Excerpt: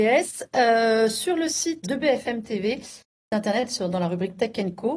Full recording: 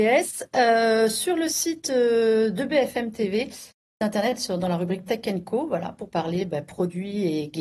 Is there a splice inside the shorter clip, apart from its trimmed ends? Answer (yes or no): yes